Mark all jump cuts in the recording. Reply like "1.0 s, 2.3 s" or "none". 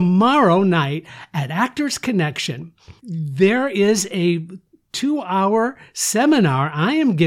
3.0 s